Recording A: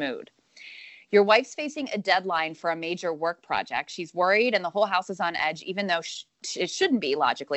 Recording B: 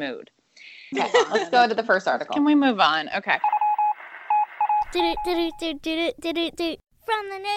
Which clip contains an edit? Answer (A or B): B